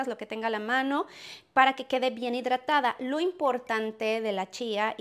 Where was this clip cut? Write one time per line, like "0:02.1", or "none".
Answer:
none